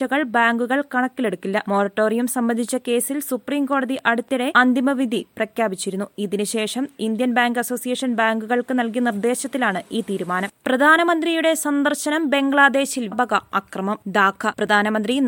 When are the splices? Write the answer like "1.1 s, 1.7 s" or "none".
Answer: 13.1 s